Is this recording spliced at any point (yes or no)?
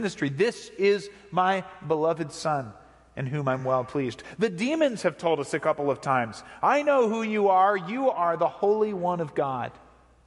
no